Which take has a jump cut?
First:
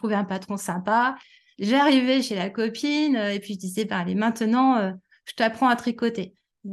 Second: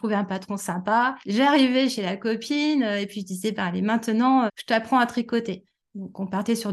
second; 2 cuts; at 1.2 s, 4.5 s

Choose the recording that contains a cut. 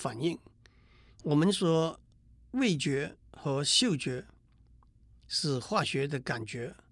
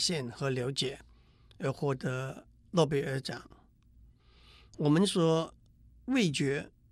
first; 2 cuts; at 1.1 s, 3.2 s

